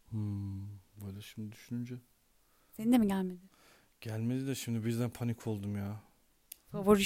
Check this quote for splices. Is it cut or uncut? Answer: uncut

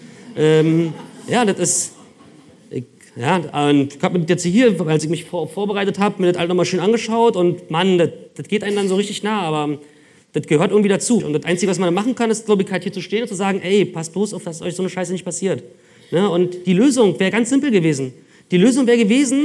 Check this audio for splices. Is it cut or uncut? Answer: cut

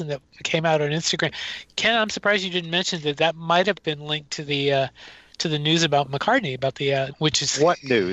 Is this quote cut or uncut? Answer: cut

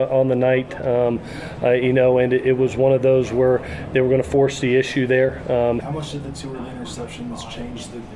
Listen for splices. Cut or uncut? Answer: cut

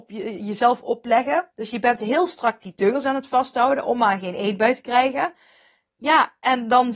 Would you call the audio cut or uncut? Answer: uncut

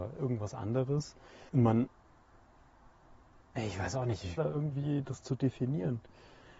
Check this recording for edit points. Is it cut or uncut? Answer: cut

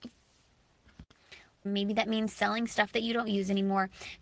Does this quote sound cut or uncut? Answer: cut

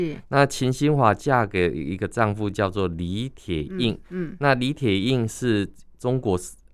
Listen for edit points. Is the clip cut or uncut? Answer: uncut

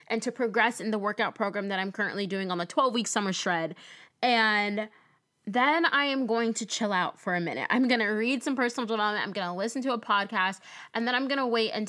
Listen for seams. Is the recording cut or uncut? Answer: uncut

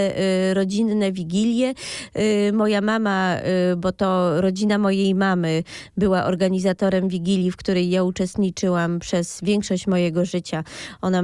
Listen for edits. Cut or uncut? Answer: uncut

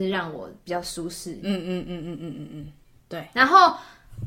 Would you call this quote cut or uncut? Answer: uncut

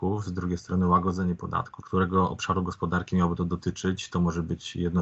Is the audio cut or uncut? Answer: cut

